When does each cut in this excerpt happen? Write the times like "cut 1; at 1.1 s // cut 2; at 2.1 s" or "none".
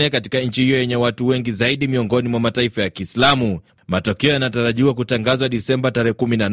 none